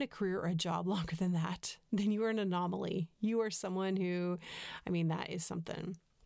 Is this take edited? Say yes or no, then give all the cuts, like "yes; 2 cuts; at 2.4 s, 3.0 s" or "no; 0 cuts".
no; 0 cuts